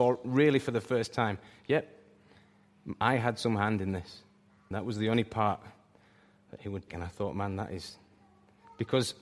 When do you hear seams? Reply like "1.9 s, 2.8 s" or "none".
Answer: 4.7 s, 6.9 s

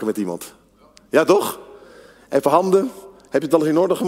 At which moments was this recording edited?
none

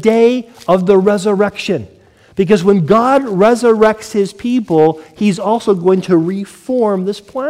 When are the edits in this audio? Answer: none

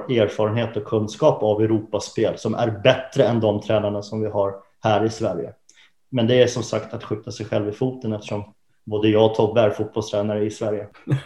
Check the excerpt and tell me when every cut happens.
none

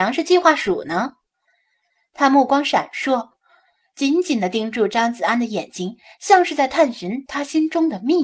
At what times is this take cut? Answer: none

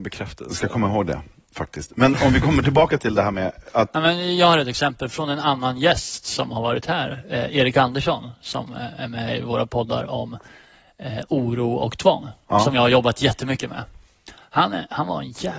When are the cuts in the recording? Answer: none

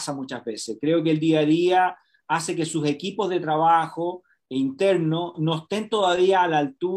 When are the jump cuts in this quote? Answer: 5.3 s

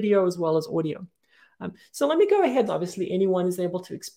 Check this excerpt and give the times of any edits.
2.7 s

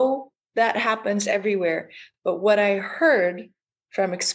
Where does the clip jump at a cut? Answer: none

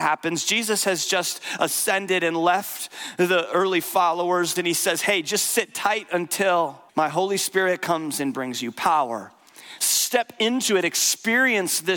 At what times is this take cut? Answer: 4.6 s, 6.9 s, 9.8 s

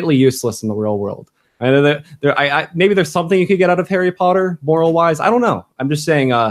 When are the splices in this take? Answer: none

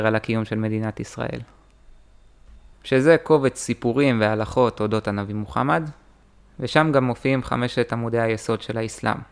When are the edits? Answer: 2.7 s

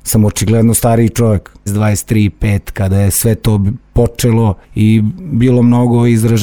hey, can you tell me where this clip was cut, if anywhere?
1.7 s, 4.6 s

